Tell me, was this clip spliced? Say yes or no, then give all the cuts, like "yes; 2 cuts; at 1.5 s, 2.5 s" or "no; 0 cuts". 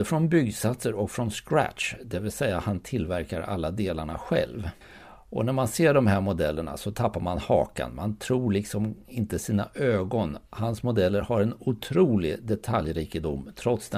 no; 0 cuts